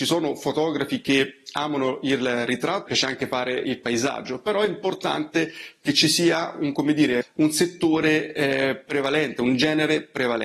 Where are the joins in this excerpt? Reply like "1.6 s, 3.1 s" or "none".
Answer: 2.9 s, 7.2 s